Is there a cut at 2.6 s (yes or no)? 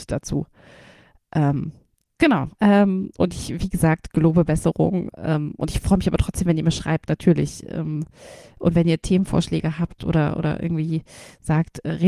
yes